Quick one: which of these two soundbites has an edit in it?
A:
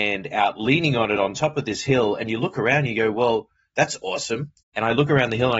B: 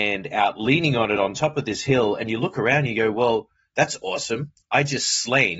A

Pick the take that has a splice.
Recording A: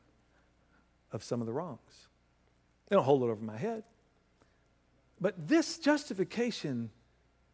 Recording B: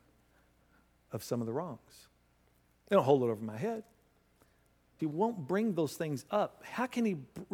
B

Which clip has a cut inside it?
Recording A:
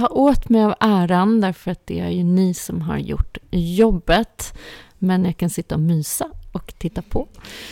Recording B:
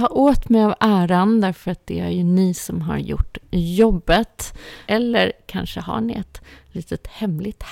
B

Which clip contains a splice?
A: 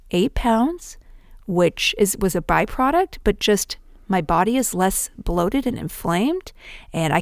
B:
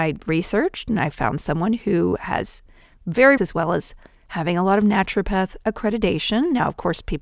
B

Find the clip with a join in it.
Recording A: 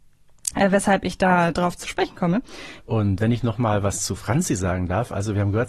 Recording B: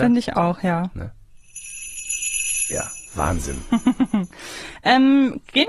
A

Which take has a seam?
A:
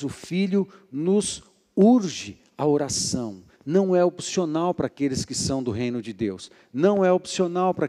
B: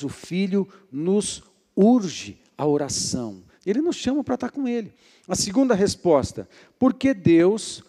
B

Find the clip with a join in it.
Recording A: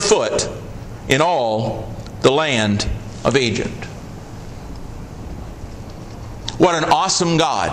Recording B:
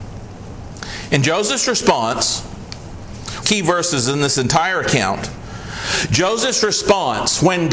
B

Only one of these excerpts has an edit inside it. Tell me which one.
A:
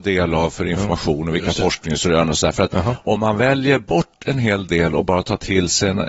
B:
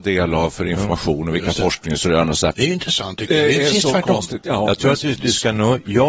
B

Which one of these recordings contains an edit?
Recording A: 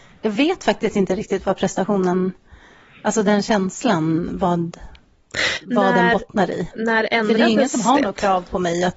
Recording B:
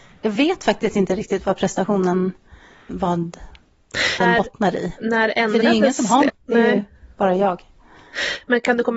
B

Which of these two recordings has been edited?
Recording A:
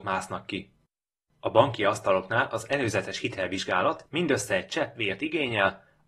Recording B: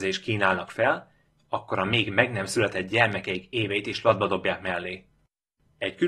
B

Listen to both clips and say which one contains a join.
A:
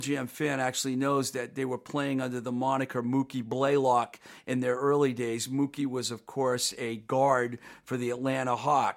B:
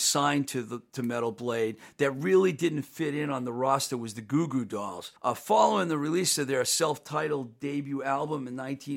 B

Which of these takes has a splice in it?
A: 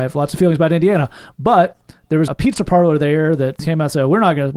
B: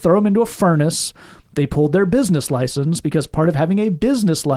A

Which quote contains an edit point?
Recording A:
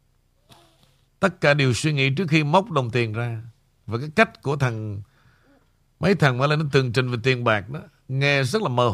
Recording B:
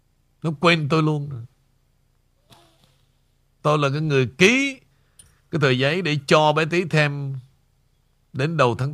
A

